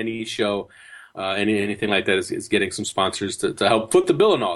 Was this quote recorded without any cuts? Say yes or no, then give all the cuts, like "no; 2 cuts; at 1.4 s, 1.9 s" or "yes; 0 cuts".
yes; 0 cuts